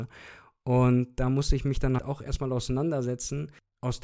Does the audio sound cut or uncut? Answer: cut